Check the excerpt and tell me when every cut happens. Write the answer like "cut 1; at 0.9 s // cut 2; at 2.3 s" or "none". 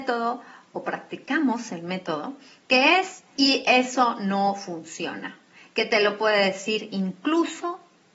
cut 1; at 3.4 s